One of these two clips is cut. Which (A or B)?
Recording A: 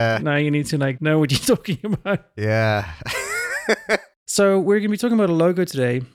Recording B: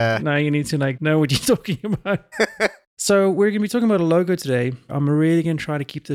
B